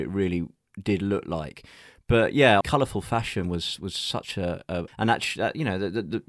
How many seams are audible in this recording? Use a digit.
2